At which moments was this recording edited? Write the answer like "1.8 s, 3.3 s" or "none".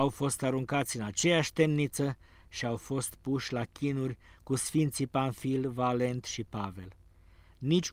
none